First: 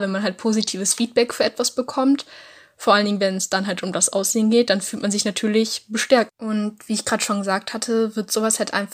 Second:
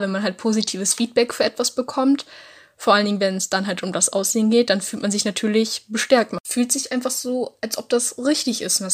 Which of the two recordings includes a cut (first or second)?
first